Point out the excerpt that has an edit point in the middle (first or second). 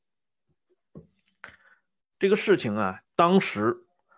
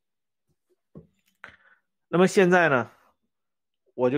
first